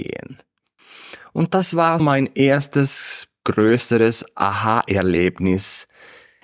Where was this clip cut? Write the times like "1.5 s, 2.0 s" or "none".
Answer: 2.0 s